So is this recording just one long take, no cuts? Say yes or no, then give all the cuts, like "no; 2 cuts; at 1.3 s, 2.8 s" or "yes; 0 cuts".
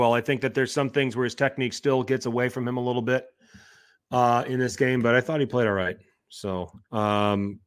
yes; 0 cuts